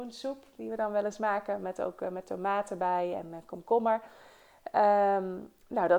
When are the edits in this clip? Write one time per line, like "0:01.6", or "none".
none